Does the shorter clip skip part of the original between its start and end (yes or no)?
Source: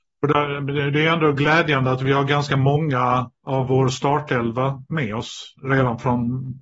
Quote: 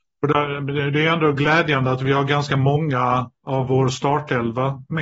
no